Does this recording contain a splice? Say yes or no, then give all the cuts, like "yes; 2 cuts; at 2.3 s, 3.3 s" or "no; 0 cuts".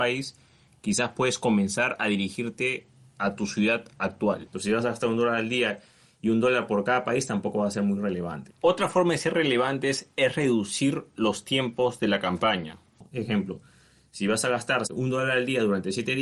yes; 2 cuts; at 4.5 s, 8.5 s